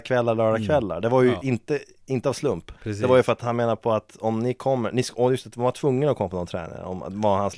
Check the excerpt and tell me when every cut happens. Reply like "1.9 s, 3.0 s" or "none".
2.8 s